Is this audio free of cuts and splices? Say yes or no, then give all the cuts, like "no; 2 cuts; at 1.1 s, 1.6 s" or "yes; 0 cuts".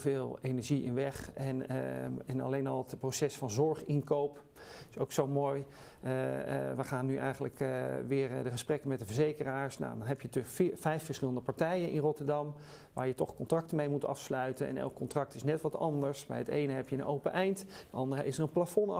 yes; 0 cuts